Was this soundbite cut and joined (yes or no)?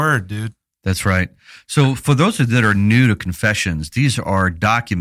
no